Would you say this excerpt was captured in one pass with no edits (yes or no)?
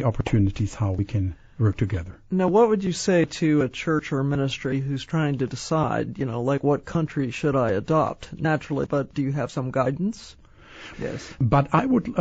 no